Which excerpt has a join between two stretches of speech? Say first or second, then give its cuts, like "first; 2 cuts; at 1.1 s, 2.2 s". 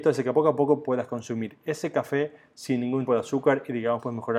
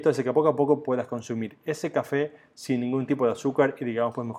first; 1 cut; at 3.1 s